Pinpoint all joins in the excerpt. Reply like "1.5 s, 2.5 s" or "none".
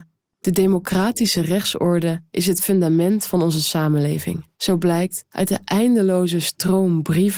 4.5 s